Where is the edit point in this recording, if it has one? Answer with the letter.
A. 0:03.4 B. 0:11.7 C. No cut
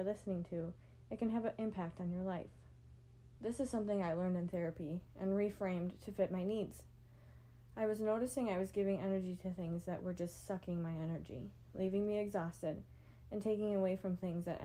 A